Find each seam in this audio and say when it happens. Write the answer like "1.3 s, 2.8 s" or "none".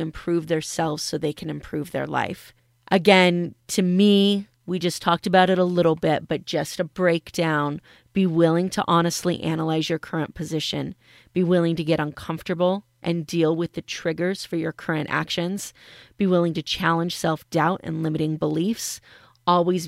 none

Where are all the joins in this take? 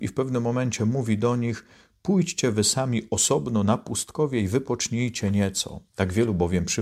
5.9 s

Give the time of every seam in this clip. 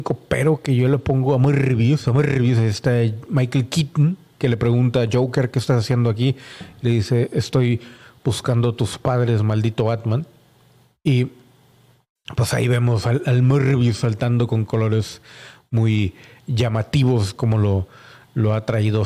4.3 s

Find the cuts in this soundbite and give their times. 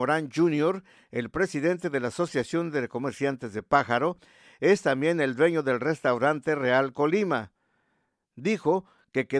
none

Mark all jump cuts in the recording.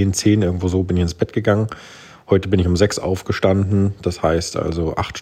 none

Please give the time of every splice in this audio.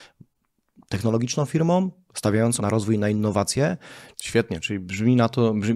2.6 s, 4.1 s

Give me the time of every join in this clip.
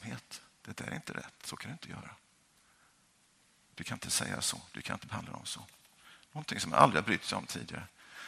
none

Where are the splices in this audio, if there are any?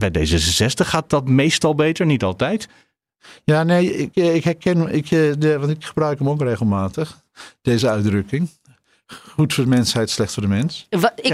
none

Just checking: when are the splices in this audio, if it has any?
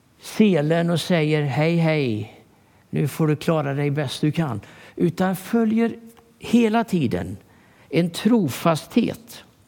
none

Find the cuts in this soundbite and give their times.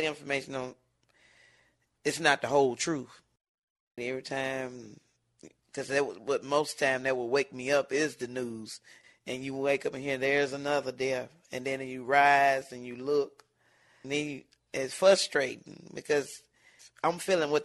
4.0 s, 14.0 s

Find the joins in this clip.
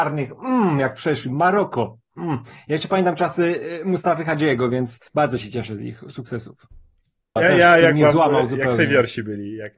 5.1 s, 7.4 s

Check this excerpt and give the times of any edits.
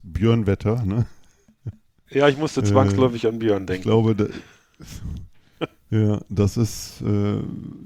none

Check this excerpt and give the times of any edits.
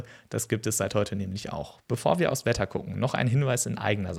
1.8 s

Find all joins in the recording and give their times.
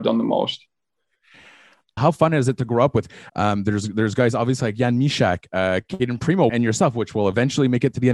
2.0 s, 3.3 s, 6.5 s

